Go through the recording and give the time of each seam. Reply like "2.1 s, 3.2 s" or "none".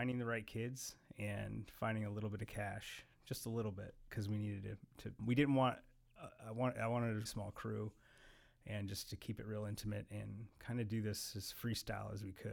5.2 s, 7.3 s